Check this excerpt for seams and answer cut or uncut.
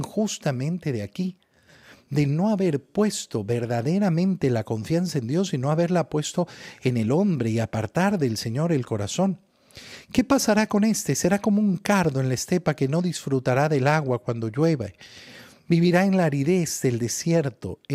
uncut